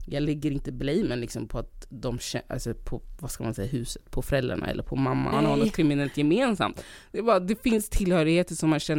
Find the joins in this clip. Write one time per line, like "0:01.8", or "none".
0:05.3